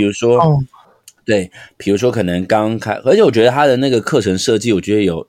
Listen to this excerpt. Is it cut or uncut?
uncut